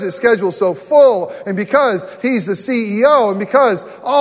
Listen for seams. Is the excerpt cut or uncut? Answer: uncut